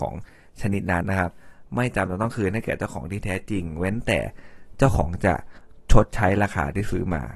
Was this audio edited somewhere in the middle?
yes; 1 cut; at 1.0 s

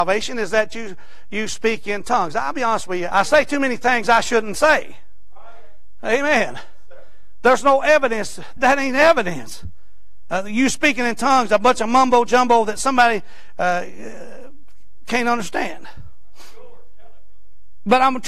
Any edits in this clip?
yes; 2 cuts; at 3.1 s, 8.6 s

